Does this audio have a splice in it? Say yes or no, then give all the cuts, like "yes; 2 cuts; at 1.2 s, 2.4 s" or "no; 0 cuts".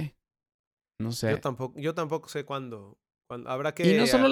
no; 0 cuts